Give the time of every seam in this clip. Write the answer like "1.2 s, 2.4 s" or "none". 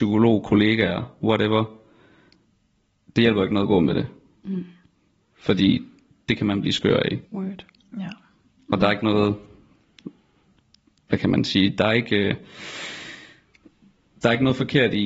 7.2 s